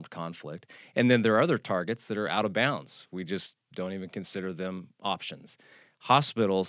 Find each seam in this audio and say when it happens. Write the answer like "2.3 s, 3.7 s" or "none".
none